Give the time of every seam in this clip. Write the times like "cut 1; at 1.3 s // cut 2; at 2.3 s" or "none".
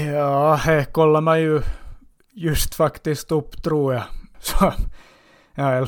cut 1; at 4.3 s